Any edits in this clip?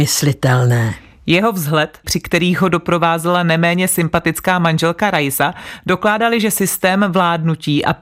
yes; 1 cut; at 2.0 s

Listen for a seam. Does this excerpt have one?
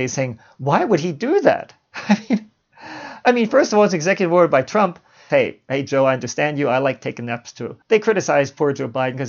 yes; 2 cuts; at 5.3 s, 7.8 s

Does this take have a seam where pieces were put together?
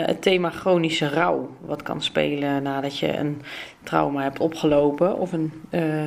no; 0 cuts

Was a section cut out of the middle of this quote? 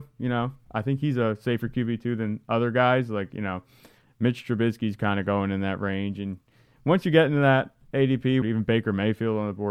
yes; 1 cut; at 8.4 s

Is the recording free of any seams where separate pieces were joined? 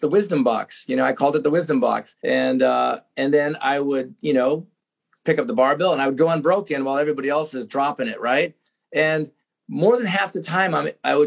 no; 1 cut; at 2.2 s

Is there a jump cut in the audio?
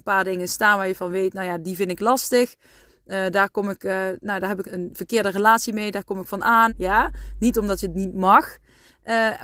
yes; 2 cuts; at 4.6 s, 6.7 s

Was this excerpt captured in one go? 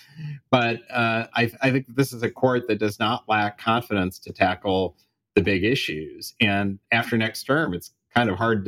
yes; 0 cuts

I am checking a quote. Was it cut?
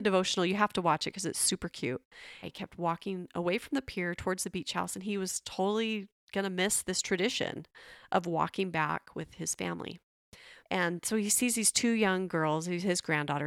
yes; 2 cuts; at 2.4 s, 10.6 s

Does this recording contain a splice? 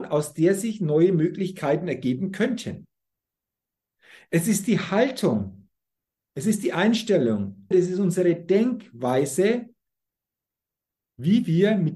yes; 1 cut; at 7.7 s

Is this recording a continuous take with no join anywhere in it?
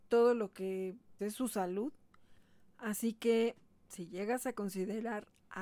no; 1 cut; at 1.2 s

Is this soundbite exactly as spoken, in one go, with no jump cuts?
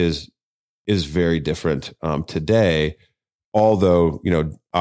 yes; 0 cuts

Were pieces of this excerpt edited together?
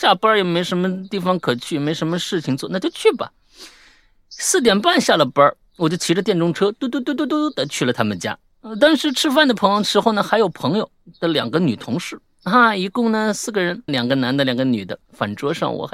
yes; 1 cut; at 13.9 s

